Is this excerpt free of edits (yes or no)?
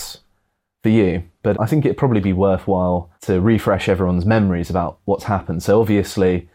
no